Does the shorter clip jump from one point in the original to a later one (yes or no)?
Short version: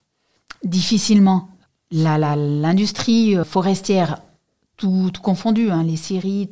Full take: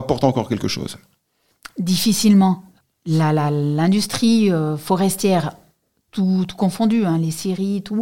yes